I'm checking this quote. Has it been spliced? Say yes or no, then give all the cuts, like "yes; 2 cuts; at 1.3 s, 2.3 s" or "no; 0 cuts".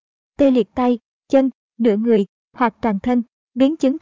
no; 0 cuts